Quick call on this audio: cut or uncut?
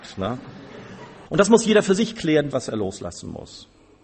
cut